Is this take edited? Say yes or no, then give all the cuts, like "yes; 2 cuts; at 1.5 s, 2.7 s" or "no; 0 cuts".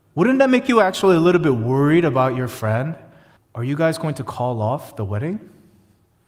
yes; 1 cut; at 3.4 s